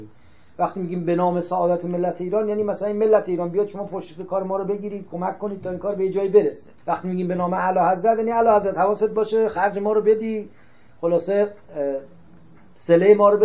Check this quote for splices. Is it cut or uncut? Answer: cut